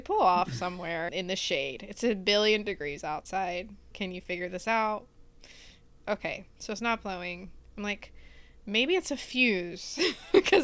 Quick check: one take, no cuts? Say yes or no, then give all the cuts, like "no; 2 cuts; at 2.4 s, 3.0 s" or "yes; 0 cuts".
no; 2 cuts; at 1.1 s, 3.9 s